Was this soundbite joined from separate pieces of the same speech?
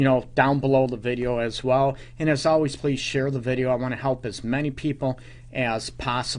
yes; 1 cut; at 2.8 s

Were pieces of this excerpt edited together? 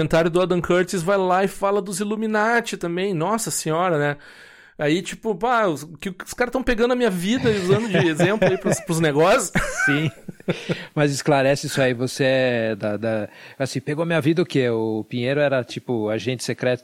no; 0 cuts

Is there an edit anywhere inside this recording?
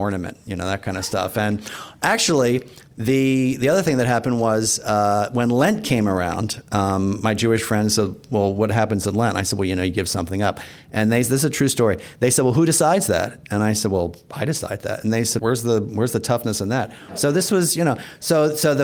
yes; 2 cuts; at 15.4 s, 17.1 s

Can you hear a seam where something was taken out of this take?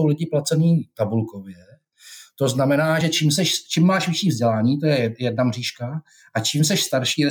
no; 0 cuts

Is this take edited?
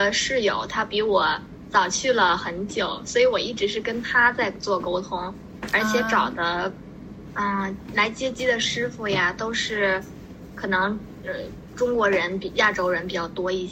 no; 0 cuts

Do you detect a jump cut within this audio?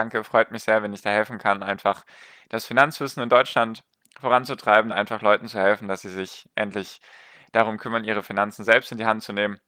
no; 0 cuts

